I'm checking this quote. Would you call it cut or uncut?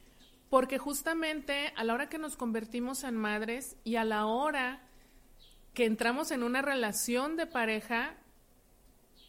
cut